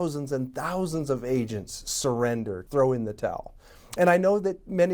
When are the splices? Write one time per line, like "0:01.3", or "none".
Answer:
0:02.7

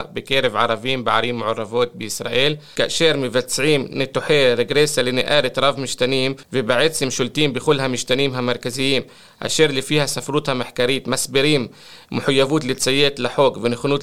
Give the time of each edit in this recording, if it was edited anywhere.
none

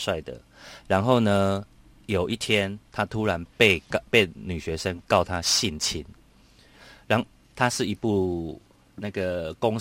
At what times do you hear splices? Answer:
0:04.1
0:07.4

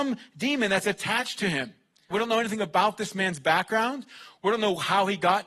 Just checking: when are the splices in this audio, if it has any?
0:02.1

